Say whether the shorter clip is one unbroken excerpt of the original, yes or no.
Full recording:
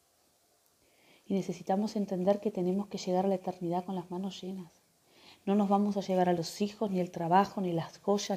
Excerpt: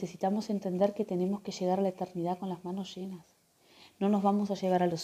yes